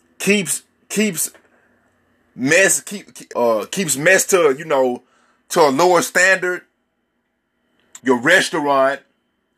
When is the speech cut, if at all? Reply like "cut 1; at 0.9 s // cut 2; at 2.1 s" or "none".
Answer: cut 1; at 3.3 s // cut 2; at 8.0 s